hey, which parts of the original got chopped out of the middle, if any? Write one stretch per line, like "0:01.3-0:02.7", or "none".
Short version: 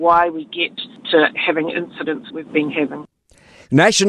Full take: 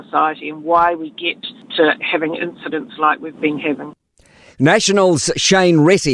0:03.0-0:03.2